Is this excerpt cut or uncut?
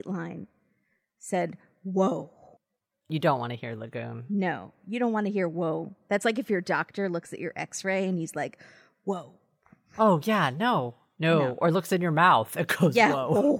uncut